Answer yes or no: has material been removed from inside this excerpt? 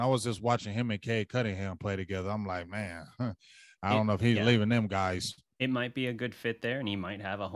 no